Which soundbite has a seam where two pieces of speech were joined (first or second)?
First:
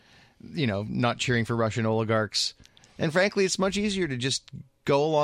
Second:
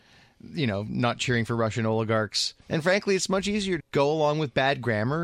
second